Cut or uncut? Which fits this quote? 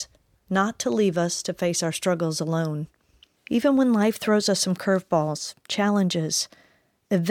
cut